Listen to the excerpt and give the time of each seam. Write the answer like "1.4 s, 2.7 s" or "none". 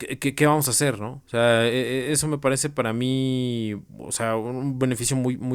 1.2 s